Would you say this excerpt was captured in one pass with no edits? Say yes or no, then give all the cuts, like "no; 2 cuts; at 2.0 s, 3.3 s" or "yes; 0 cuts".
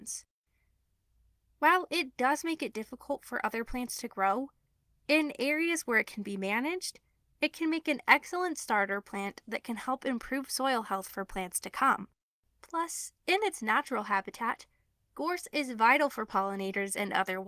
yes; 0 cuts